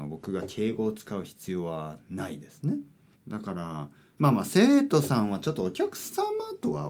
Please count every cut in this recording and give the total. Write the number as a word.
one